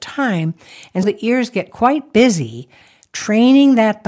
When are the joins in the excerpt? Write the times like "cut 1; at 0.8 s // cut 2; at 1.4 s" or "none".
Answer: cut 1; at 1.0 s